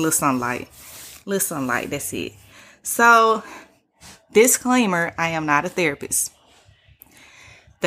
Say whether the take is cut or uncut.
uncut